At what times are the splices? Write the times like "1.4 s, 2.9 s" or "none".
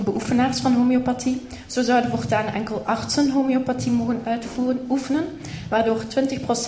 none